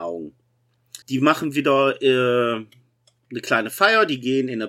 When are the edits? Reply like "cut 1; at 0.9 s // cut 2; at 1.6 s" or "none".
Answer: cut 1; at 1.0 s